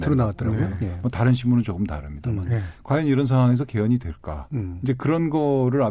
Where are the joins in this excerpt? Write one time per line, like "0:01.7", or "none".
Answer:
none